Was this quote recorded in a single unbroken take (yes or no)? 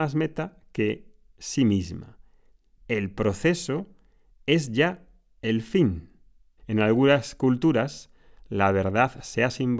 no